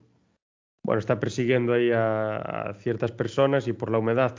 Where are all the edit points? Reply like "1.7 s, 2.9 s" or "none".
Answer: none